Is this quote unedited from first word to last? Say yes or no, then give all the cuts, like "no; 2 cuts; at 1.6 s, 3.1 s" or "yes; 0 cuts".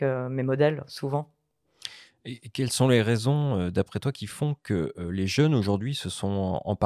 yes; 0 cuts